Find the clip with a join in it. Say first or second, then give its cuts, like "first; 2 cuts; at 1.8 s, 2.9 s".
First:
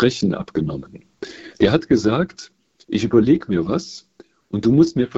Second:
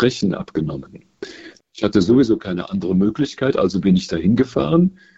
second; 1 cut; at 1.6 s